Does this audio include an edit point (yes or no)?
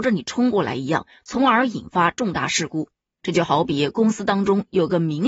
no